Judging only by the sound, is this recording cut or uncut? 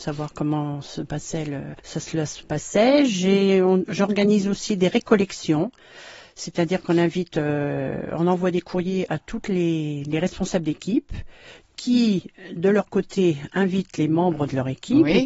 cut